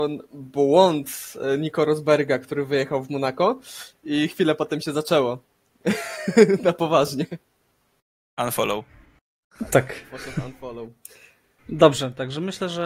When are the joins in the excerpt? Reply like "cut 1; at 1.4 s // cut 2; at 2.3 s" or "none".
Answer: none